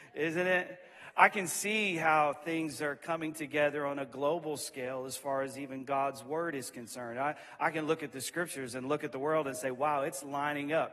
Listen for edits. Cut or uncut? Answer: uncut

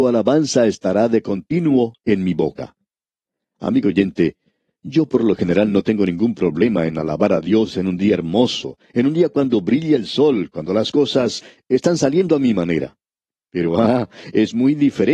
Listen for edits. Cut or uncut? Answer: uncut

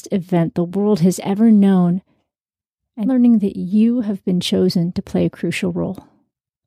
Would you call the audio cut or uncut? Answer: cut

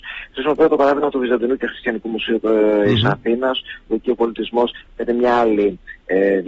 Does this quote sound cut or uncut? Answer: cut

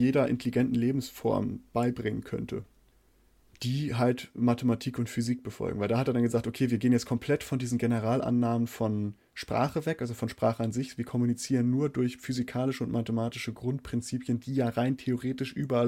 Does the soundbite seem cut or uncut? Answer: uncut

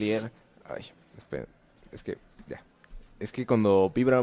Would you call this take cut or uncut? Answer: uncut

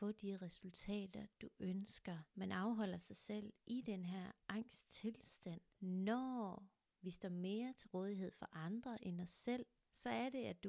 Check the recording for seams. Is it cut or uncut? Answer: cut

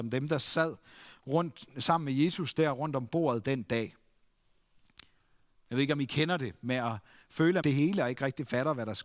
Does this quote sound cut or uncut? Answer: cut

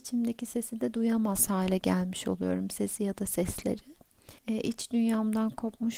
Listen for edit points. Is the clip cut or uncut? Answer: cut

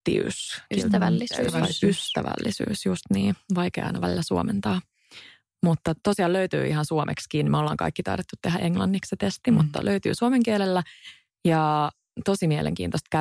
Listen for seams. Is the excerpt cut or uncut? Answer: uncut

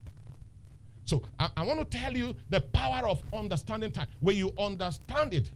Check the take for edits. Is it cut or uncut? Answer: uncut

